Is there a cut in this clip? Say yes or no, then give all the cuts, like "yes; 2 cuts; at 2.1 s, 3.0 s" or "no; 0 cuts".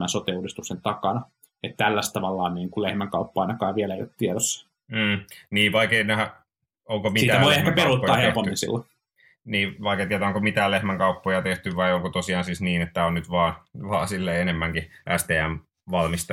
no; 0 cuts